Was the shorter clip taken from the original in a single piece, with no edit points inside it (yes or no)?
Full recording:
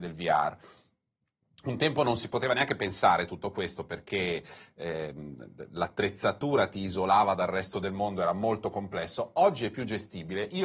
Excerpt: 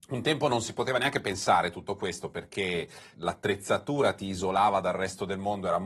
no